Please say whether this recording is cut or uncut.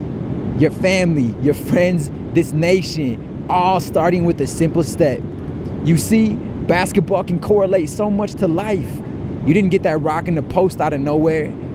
uncut